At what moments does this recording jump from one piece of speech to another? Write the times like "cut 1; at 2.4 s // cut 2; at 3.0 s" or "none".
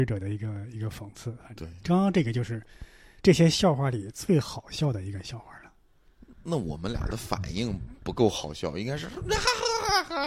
none